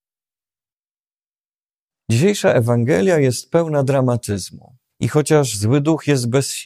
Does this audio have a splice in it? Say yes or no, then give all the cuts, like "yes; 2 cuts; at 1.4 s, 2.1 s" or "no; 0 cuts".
yes; 1 cut; at 4.9 s